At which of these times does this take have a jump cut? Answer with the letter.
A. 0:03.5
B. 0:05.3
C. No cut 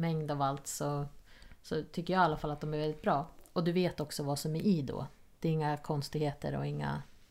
C